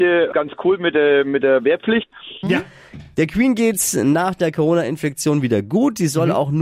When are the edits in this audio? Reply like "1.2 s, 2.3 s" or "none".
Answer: 2.4 s